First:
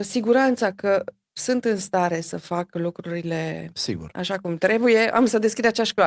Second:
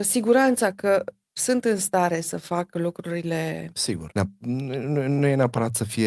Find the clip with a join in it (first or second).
second